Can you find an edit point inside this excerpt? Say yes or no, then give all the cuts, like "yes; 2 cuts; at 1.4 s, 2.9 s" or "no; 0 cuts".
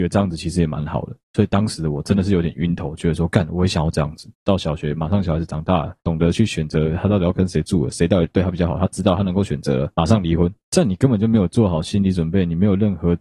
yes; 2 cuts; at 4.3 s, 10.6 s